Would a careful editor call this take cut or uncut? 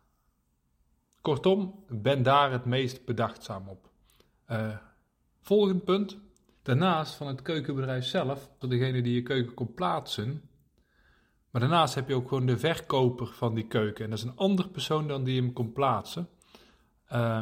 cut